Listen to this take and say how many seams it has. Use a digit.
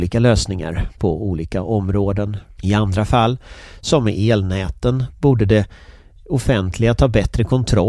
1